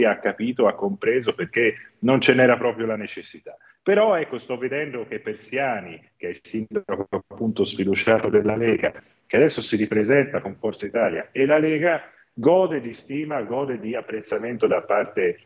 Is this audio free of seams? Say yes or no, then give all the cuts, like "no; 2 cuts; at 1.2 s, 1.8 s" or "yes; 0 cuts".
yes; 0 cuts